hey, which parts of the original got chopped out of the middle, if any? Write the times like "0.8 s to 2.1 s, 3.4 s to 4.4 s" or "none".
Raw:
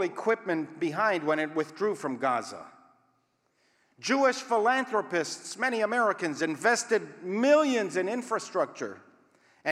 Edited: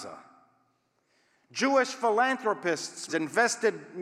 5.6 s to 6.4 s